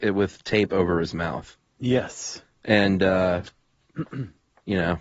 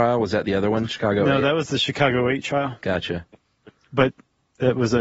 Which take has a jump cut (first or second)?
second